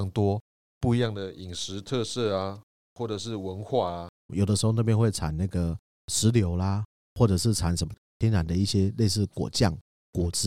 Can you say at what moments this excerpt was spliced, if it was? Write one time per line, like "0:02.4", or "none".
0:04.3